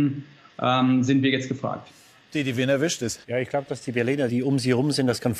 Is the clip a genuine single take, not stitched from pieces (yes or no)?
no